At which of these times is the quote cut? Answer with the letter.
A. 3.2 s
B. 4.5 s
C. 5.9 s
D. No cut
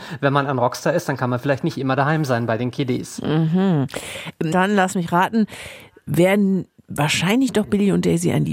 B